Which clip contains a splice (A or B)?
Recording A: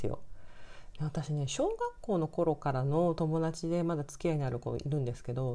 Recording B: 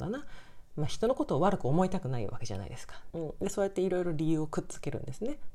B